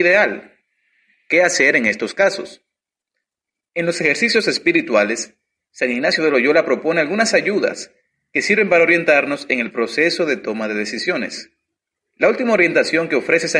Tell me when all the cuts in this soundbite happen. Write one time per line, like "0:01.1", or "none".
none